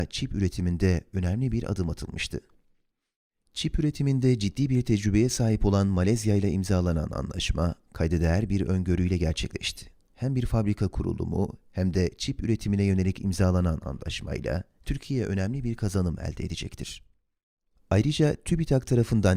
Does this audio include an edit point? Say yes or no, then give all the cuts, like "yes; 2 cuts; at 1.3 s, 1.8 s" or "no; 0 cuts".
no; 0 cuts